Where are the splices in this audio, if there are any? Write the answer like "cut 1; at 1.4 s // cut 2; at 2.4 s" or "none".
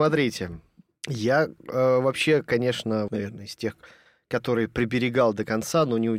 cut 1; at 3.1 s